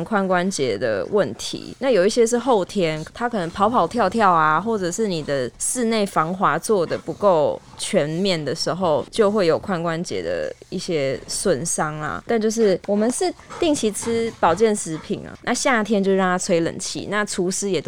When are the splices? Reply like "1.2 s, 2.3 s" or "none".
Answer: 15.4 s